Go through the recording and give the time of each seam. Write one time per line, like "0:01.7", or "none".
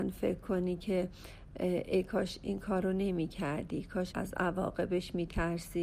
0:04.1